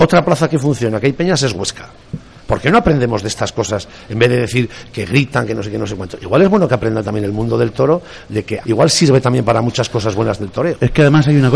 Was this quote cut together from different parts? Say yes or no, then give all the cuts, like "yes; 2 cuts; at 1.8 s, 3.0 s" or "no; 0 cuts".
yes; 1 cut; at 8.6 s